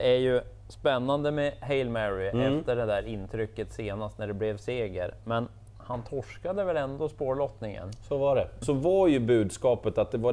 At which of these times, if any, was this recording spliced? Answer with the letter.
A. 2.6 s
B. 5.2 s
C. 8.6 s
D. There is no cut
C